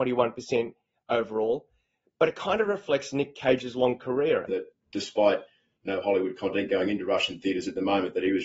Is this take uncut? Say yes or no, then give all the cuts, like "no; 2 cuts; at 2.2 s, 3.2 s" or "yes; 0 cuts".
no; 1 cut; at 4.5 s